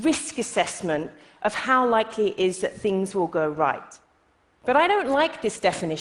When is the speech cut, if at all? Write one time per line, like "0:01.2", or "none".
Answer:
none